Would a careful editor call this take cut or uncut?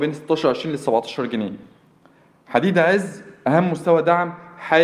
uncut